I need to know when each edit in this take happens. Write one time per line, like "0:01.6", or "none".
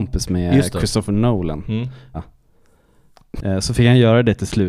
0:02.1
0:03.4